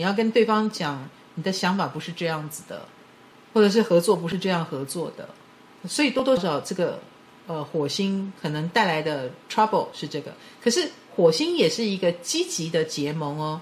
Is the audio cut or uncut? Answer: cut